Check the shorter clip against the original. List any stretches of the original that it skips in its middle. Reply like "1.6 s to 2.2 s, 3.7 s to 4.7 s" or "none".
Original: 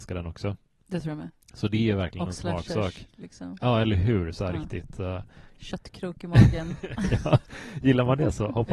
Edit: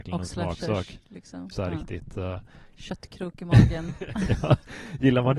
3.6 s to 4.3 s

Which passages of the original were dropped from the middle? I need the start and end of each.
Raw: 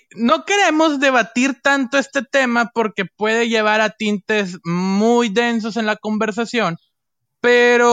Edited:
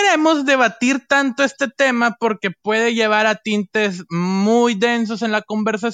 none

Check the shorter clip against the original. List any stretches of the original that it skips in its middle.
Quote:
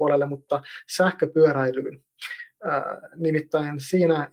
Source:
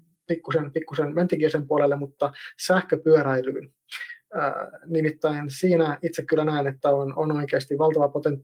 none

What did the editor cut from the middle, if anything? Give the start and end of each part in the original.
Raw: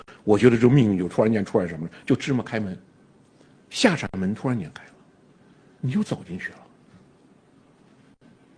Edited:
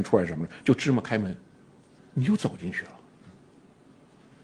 3.4 s to 5.6 s

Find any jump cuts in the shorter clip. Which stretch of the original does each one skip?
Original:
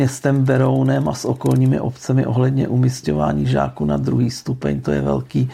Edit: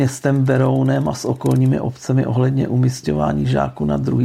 none

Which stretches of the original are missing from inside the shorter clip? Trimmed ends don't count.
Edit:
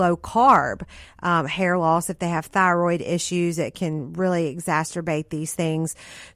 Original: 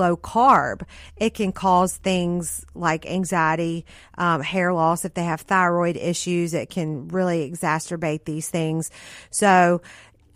1.0 s to 4.0 s

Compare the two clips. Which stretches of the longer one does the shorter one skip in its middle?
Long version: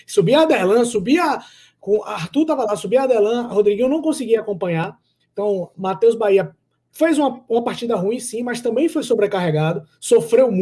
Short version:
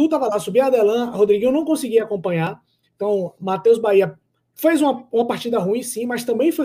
none

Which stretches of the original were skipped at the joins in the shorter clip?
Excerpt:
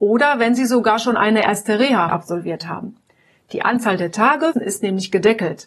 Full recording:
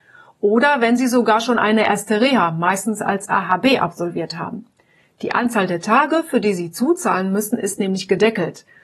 2.5 s to 3.8 s, 6.2 s to 7.5 s

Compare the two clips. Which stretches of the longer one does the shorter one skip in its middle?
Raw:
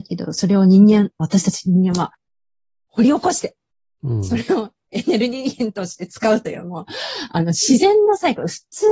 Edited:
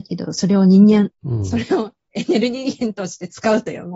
1.1 s to 3.9 s

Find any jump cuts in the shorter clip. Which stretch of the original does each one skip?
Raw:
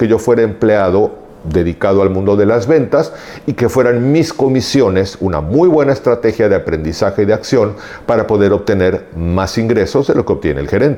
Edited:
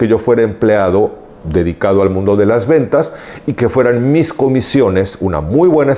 none

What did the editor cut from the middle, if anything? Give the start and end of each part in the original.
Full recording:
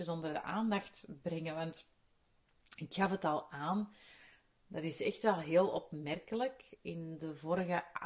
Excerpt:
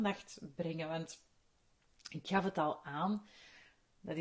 none

